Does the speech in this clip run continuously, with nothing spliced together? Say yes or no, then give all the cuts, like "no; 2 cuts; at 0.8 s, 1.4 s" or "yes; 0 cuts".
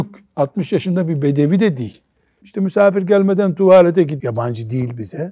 no; 2 cuts; at 2.4 s, 4.2 s